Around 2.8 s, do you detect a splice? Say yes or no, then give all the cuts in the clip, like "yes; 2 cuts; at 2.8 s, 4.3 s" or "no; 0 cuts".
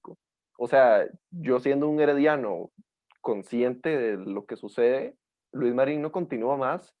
no; 1 cut; at 5.4 s